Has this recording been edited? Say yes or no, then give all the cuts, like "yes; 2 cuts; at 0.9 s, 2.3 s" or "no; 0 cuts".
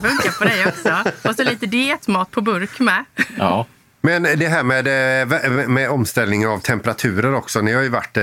no; 0 cuts